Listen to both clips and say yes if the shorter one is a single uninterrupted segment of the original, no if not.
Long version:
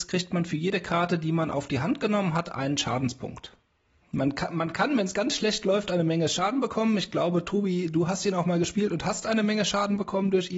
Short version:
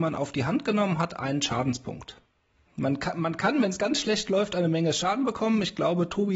yes